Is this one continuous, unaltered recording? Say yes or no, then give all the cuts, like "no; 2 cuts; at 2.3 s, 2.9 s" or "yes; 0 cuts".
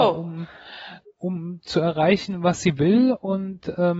no; 1 cut; at 1.0 s